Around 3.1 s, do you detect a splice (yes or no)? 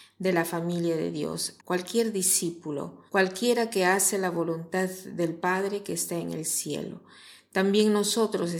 yes